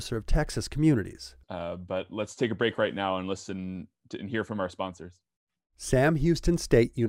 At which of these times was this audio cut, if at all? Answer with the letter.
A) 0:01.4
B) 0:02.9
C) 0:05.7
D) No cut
A